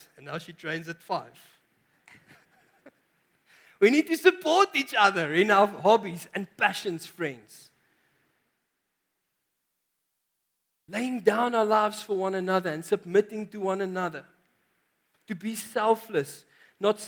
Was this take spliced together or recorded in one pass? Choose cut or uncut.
uncut